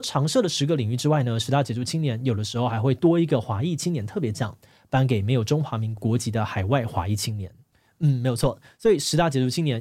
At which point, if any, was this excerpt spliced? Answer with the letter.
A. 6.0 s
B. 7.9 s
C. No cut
A